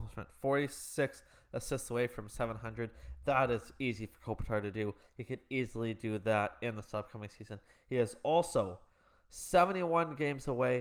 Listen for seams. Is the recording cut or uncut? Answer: uncut